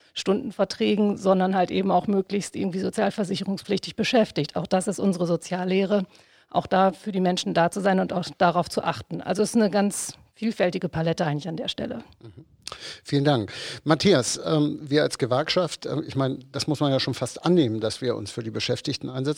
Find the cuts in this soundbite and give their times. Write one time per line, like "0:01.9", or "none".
none